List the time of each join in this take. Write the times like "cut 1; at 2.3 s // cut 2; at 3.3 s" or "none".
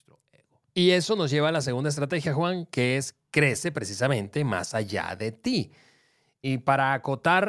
cut 1; at 6.4 s